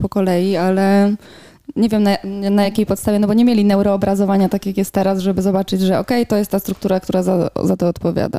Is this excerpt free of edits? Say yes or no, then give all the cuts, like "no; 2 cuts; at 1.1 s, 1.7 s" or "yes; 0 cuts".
yes; 0 cuts